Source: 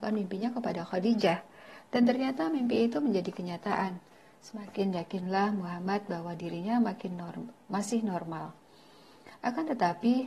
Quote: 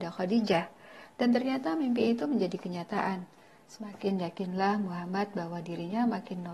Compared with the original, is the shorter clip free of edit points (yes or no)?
yes